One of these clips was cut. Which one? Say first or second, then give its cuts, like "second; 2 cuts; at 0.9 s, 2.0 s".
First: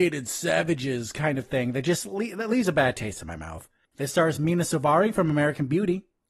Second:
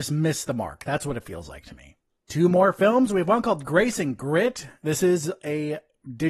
first; 1 cut; at 3.9 s